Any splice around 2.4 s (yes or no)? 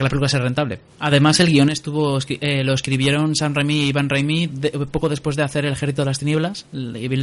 no